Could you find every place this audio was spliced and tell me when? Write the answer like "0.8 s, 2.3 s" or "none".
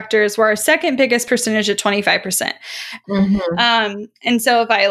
3.0 s

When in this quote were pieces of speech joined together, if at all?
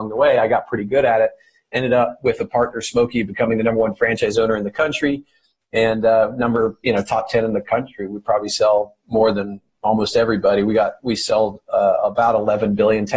none

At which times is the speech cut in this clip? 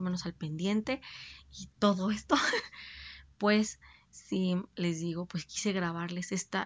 none

